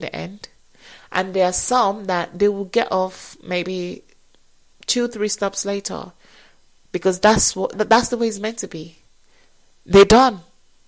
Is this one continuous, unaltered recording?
no; 1 cut; at 7.7 s

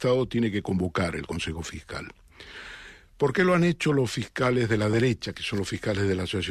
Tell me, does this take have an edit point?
no; 0 cuts

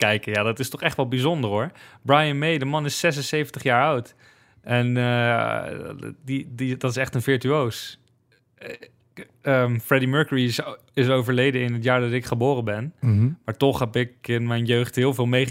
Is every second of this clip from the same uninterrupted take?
yes; 0 cuts

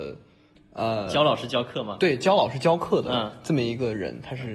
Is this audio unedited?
yes; 0 cuts

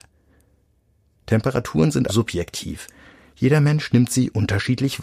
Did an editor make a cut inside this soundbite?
yes; 1 cut; at 2.1 s

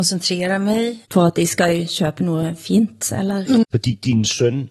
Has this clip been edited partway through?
yes; 2 cuts; at 1.0 s, 3.6 s

